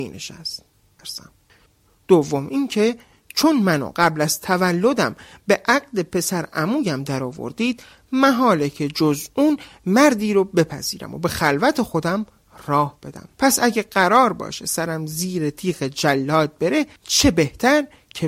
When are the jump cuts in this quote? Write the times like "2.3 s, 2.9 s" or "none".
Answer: 1.0 s, 13.3 s, 17.0 s